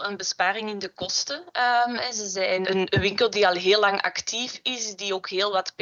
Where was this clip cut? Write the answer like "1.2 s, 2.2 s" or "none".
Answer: 2.6 s